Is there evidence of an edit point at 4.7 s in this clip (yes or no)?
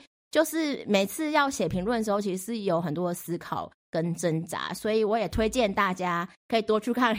no